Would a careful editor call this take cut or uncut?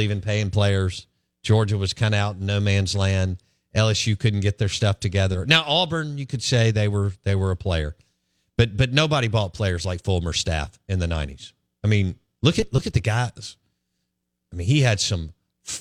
uncut